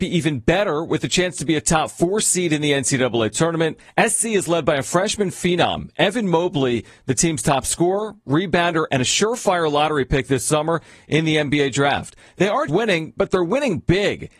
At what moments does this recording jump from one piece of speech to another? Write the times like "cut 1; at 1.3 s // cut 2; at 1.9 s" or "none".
cut 1; at 8.9 s // cut 2; at 12.7 s